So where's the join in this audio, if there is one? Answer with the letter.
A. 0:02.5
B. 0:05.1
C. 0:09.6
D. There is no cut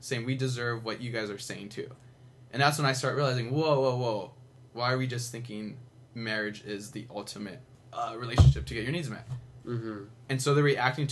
C